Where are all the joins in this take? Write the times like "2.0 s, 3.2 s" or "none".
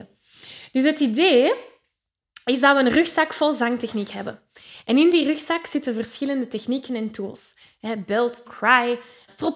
8.4 s